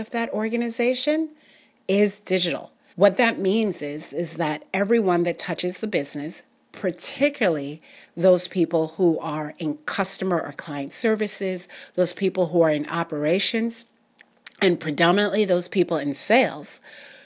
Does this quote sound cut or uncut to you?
cut